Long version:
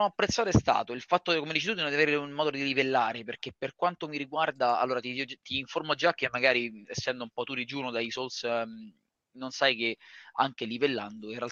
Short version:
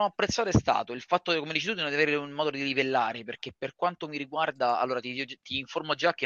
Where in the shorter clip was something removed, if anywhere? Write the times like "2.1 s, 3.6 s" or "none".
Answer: none